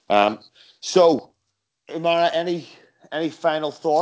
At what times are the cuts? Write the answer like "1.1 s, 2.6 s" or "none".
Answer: 1.7 s